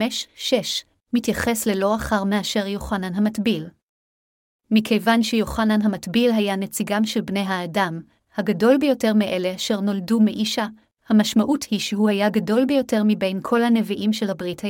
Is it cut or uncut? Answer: uncut